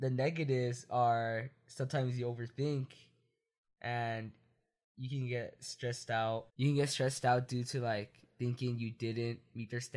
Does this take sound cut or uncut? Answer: cut